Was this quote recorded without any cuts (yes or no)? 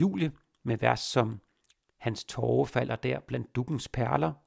yes